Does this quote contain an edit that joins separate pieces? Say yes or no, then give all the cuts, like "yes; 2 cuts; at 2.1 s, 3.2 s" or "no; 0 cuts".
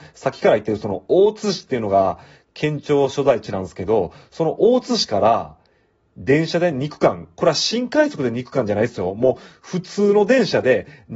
no; 0 cuts